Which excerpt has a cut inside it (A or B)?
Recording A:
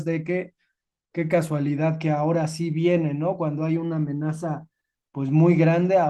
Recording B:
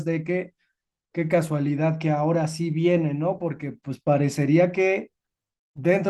B